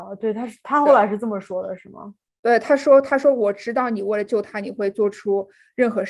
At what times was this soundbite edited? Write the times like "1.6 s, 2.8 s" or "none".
none

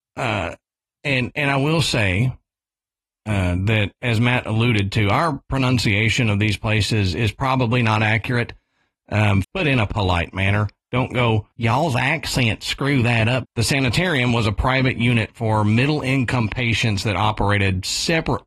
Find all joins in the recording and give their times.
9.4 s, 11.5 s, 13.4 s

